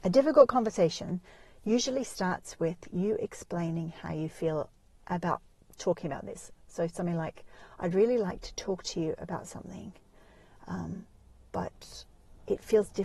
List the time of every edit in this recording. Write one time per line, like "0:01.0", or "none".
none